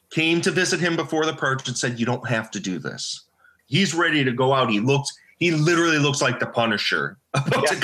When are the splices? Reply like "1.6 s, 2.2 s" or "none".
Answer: 3.6 s